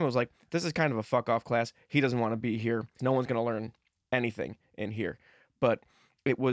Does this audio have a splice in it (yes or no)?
yes